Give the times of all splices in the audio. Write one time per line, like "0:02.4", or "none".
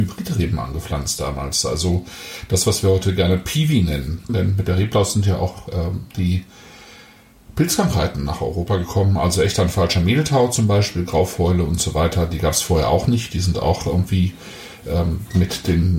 0:04.3